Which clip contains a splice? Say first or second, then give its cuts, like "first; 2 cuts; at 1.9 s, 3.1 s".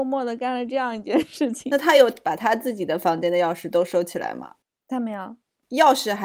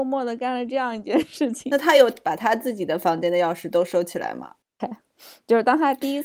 second; 1 cut; at 4.8 s